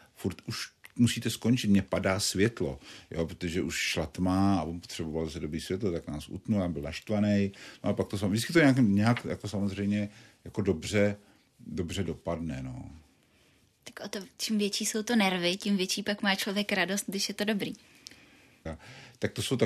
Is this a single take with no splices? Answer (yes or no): no